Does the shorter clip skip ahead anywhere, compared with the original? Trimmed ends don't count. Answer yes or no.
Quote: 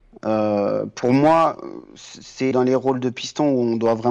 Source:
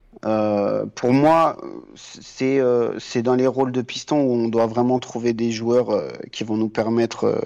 yes